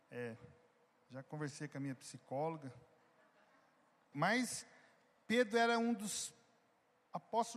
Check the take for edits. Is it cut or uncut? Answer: cut